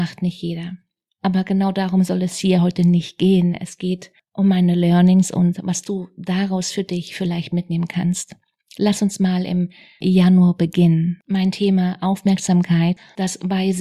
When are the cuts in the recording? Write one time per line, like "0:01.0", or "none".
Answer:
none